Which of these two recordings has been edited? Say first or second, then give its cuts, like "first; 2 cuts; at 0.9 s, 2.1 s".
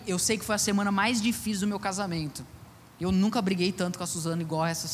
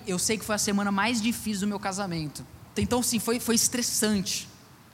second; 1 cut; at 2.8 s